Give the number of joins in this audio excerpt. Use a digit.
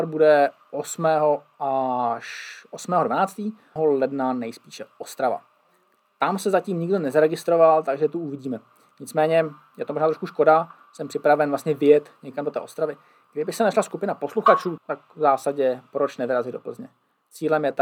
2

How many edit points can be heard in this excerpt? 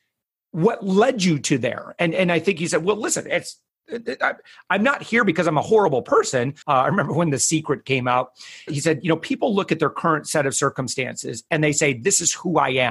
2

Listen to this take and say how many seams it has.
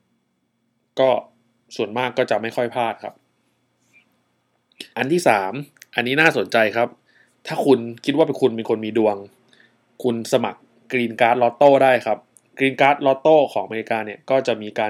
1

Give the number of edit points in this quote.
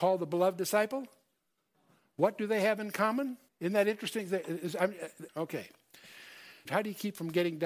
3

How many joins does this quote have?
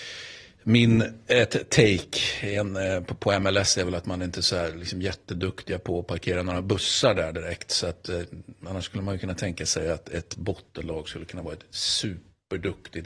0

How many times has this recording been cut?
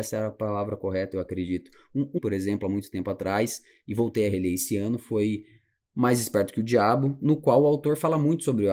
1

